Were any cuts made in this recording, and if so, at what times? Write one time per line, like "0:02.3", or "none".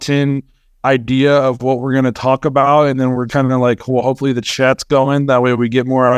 0:03.3